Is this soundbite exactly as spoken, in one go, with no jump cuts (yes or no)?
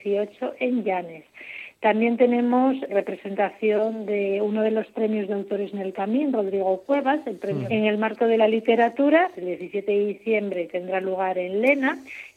no